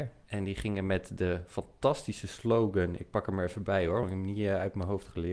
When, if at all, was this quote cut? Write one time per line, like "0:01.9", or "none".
none